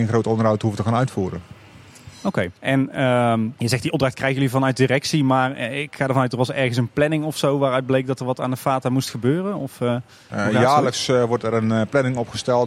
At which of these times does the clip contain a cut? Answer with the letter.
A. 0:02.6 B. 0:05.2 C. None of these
A